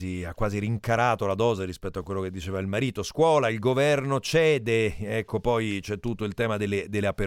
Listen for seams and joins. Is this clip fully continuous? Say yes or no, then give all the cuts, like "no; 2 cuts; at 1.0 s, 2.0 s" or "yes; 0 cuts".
yes; 0 cuts